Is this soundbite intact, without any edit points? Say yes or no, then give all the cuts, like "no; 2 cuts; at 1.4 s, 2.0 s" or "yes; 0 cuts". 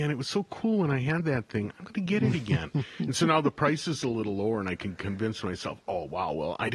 yes; 0 cuts